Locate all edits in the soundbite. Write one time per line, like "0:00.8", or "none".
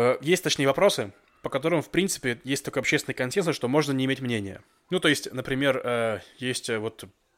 none